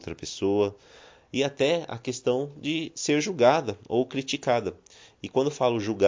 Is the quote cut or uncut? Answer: uncut